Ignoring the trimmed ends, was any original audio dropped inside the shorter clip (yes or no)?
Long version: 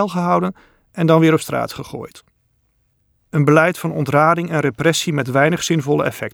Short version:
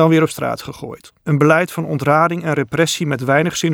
yes